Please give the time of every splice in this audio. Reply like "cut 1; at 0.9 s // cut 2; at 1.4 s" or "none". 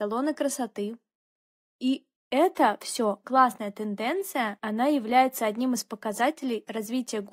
cut 1; at 3.2 s